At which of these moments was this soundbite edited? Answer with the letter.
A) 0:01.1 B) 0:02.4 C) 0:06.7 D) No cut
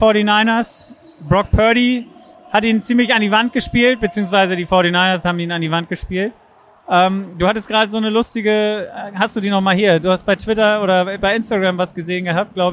D